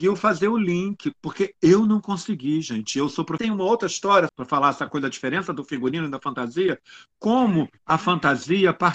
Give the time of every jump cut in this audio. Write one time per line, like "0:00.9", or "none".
0:04.3